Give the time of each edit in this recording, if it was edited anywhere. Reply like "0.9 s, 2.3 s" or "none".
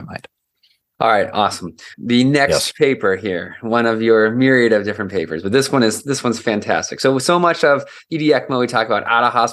1.9 s